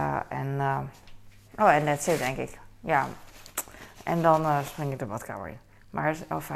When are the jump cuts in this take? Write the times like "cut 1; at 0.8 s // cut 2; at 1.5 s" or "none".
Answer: cut 1; at 1.5 s